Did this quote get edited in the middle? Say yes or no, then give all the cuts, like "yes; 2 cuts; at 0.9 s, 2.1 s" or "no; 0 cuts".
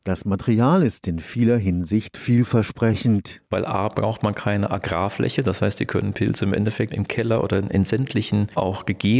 no; 0 cuts